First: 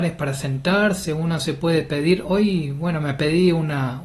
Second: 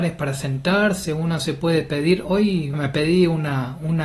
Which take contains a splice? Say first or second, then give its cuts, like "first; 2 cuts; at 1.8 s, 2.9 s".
second; 1 cut; at 2.7 s